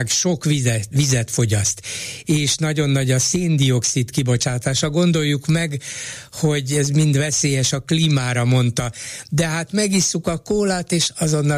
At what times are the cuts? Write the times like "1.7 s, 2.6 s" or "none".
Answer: none